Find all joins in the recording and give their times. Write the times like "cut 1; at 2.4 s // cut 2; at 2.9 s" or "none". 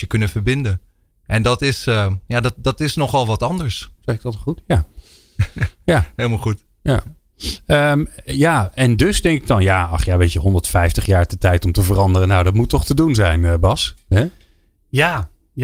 cut 1; at 4.0 s